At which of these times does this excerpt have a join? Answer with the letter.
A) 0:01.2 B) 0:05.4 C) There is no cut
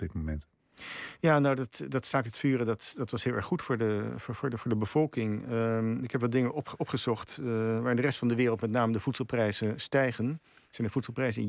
C